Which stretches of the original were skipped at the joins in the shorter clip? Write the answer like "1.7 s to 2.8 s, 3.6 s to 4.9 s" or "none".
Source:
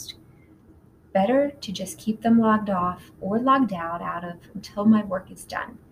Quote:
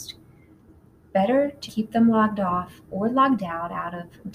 1.7 s to 2.0 s